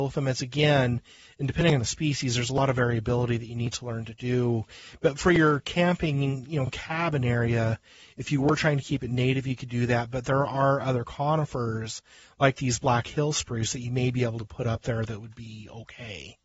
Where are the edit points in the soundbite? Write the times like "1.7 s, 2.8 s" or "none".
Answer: none

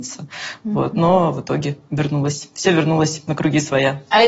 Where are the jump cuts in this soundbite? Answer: none

